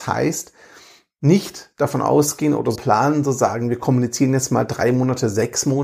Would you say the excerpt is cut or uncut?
cut